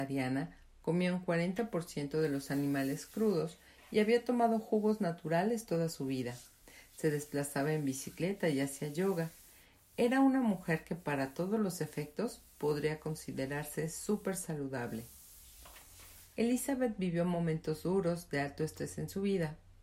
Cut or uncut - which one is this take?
uncut